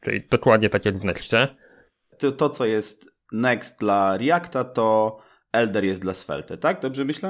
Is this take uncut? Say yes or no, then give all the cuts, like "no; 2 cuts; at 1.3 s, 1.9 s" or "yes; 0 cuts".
no; 1 cut; at 2.1 s